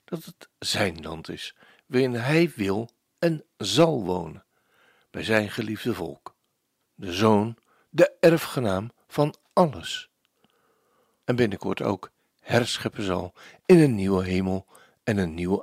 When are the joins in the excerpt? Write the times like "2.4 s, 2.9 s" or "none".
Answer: 6.8 s, 11.2 s